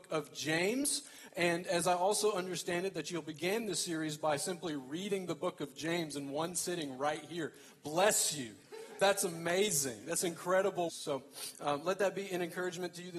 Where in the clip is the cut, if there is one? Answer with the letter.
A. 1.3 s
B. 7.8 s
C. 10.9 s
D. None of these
C